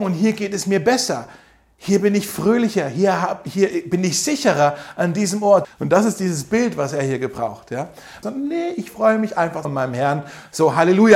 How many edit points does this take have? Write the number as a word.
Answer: three